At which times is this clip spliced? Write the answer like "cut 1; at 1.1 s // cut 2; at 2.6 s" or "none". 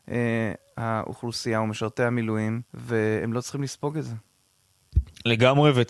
cut 1; at 2.7 s